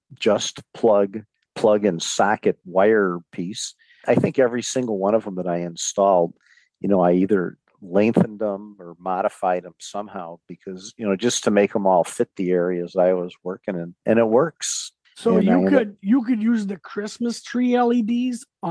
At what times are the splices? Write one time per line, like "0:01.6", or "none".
0:15.1